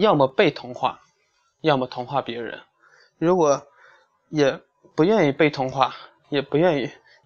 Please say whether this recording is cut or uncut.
uncut